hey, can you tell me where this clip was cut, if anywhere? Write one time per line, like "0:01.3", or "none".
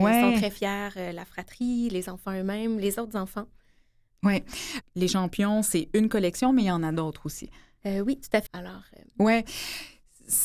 0:04.8
0:08.5